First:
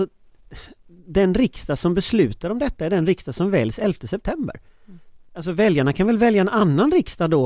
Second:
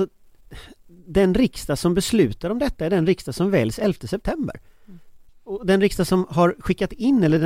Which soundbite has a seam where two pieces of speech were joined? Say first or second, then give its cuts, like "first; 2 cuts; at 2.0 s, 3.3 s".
second; 1 cut; at 5.3 s